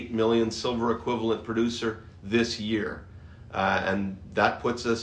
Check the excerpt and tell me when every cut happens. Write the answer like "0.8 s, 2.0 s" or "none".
none